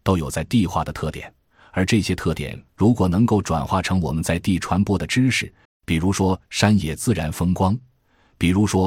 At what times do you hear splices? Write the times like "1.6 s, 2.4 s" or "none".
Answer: 5.7 s